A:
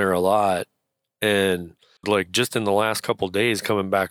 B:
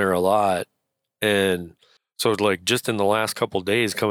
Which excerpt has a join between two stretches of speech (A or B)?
A